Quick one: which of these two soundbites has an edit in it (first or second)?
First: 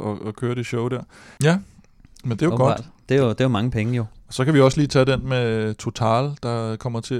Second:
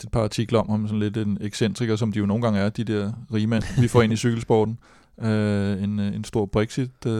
first